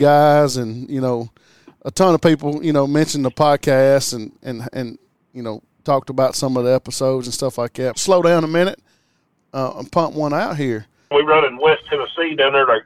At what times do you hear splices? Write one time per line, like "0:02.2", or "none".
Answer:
0:07.9
0:11.1